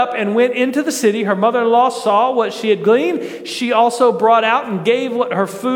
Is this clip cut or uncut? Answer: uncut